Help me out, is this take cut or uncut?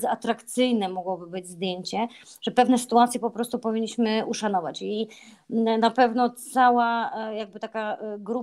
uncut